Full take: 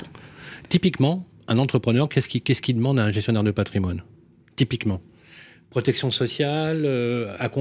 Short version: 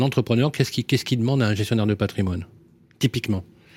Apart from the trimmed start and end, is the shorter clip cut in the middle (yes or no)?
no